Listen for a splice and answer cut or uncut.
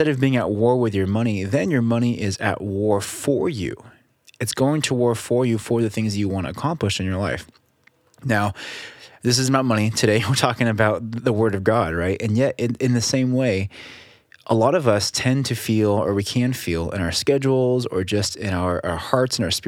uncut